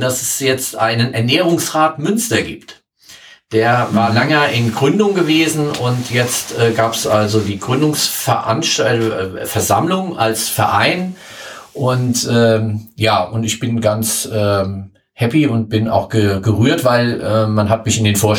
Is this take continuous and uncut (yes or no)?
yes